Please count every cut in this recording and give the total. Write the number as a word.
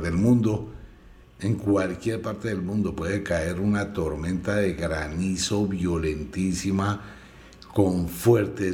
one